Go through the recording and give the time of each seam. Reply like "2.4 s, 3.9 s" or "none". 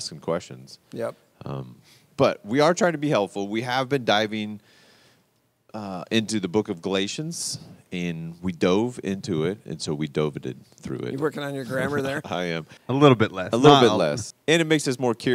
9.6 s, 12.8 s, 14.3 s